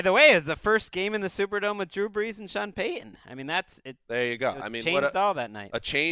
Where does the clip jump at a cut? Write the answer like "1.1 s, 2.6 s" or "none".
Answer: none